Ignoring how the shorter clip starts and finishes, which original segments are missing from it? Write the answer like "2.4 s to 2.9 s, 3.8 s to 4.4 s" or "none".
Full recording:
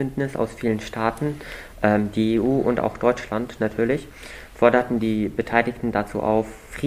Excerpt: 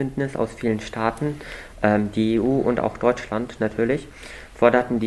none